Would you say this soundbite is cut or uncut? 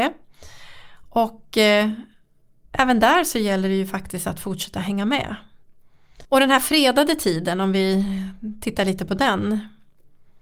cut